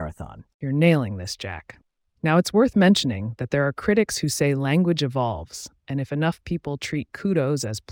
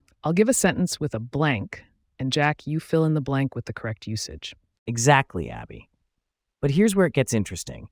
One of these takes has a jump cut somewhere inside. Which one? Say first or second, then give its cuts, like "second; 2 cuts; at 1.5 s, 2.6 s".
second; 1 cut; at 4.7 s